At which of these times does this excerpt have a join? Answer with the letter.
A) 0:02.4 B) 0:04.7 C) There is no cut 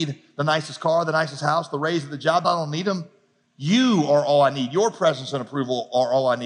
A